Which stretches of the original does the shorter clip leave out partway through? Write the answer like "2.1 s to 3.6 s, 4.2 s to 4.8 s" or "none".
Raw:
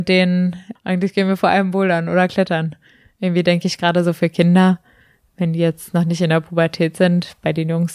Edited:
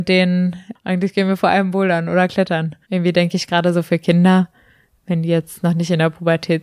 2.8 s to 3.1 s